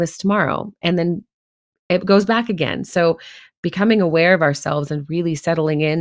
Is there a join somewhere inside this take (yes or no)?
no